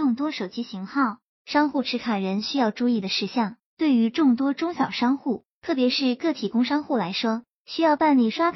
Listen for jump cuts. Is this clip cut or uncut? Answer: uncut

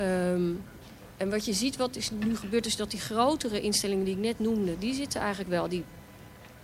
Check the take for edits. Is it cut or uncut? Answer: uncut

